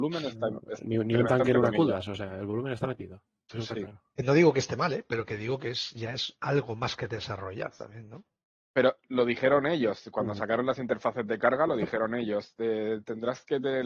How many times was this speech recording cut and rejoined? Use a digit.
0